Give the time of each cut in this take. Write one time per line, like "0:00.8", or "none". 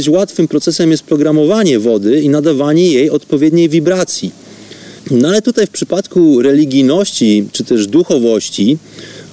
0:05.0